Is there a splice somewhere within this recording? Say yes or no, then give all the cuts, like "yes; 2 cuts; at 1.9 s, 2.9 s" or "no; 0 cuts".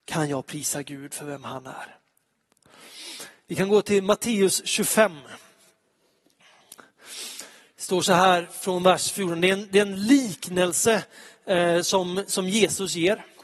no; 0 cuts